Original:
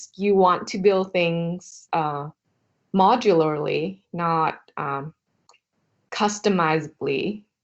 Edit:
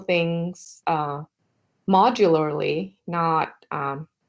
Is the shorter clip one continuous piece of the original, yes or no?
yes